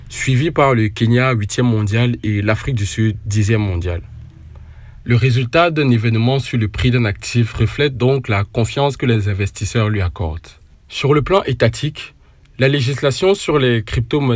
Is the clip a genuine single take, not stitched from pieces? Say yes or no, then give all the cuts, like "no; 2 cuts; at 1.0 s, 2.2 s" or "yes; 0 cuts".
no; 1 cut; at 5.0 s